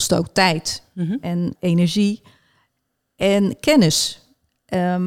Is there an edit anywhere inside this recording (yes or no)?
yes